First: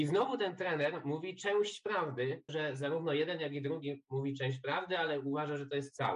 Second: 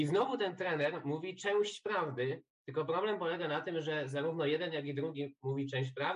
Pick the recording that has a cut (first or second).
first